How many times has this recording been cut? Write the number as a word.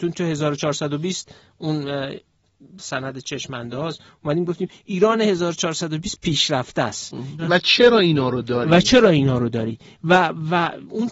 one